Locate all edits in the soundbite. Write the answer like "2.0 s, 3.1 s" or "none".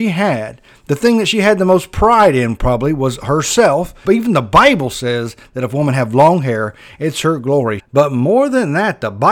4.0 s, 7.8 s

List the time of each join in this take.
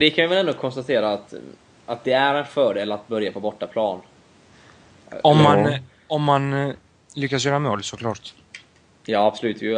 none

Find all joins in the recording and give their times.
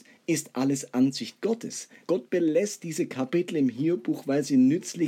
2.1 s

